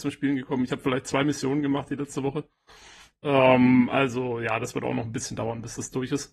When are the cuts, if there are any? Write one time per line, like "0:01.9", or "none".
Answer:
none